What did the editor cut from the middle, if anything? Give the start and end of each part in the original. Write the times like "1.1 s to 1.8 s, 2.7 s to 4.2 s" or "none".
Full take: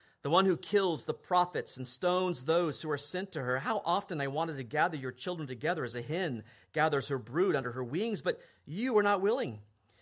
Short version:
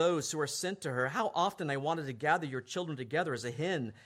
none

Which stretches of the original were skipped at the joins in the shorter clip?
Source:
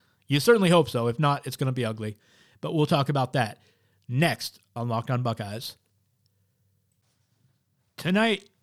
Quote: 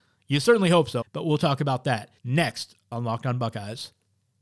1.0 s to 2.5 s, 3.7 s to 4.0 s

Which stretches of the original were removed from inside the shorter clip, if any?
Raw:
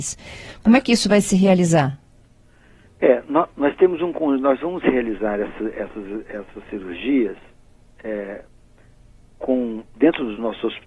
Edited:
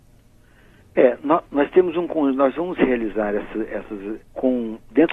6.2 s to 9.2 s

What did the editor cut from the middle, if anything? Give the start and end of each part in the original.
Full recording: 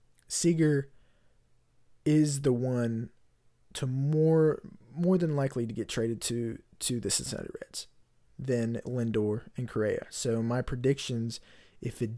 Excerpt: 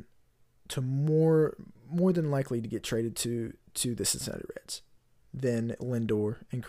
none

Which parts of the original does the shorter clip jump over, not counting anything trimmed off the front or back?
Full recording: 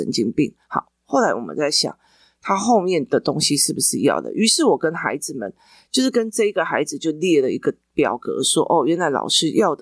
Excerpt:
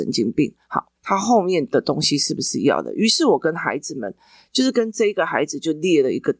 0.9 s to 2.3 s

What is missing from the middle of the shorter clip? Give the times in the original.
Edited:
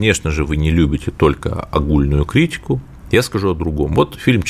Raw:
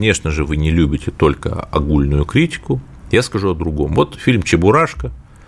none

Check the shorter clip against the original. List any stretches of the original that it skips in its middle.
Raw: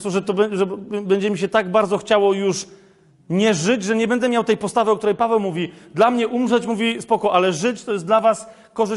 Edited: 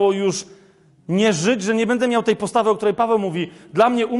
none

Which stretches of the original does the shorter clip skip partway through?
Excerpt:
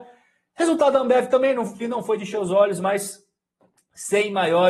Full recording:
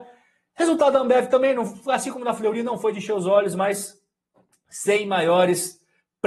1.8 s to 2.5 s

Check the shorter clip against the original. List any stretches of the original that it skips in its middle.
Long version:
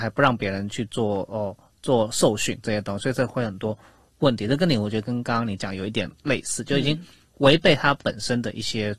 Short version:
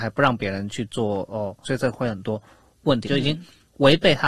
1.6 s to 3.0 s, 4.4 s to 6.7 s

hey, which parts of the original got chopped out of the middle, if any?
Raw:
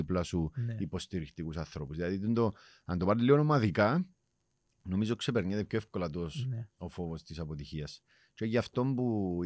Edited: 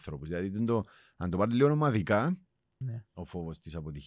4.5 s to 6.4 s

